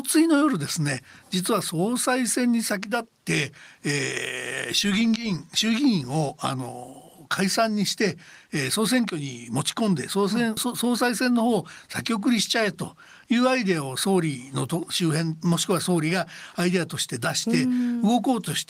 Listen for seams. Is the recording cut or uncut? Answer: cut